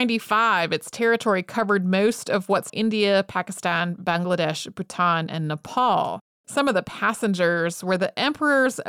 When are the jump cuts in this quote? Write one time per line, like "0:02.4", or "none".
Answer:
0:02.7
0:06.4